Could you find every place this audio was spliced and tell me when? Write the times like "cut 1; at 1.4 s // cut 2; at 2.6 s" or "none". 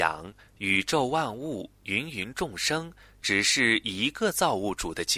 none